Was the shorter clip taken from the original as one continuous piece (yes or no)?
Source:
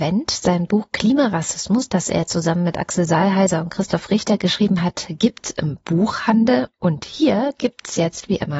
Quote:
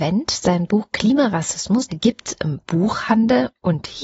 no